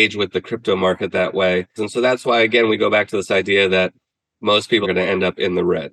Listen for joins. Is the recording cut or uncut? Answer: cut